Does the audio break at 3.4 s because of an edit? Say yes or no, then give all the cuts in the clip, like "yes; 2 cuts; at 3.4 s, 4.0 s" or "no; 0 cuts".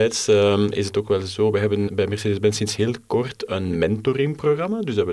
no; 1 cut; at 1.9 s